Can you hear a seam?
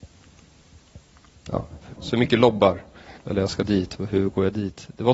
yes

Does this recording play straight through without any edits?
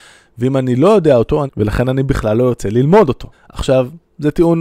no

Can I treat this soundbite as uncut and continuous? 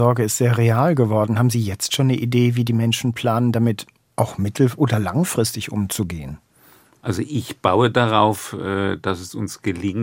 yes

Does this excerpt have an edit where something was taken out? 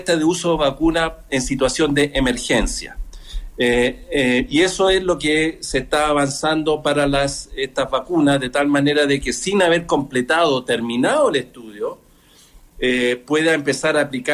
no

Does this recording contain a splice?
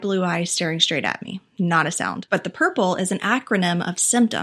yes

